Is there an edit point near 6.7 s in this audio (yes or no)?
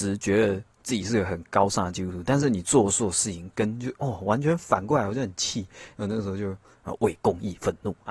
no